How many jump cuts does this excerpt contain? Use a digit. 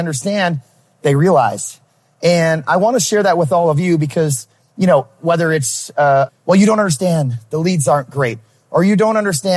1